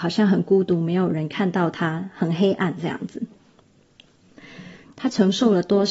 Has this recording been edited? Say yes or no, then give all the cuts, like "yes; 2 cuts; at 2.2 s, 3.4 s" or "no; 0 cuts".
yes; 1 cut; at 4.8 s